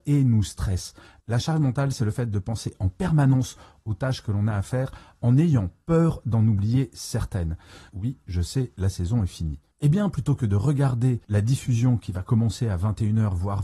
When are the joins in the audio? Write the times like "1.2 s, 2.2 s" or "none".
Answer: 7.9 s